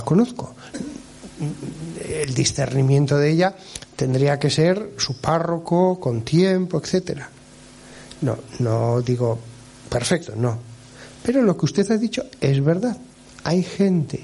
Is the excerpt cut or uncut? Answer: uncut